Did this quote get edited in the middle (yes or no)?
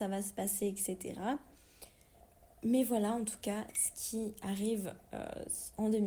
no